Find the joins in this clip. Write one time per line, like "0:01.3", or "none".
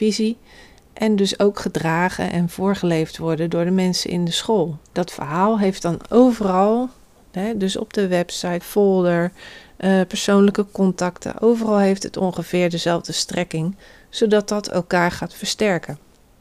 0:04.9
0:08.6